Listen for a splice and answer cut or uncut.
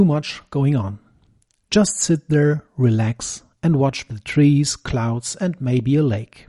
uncut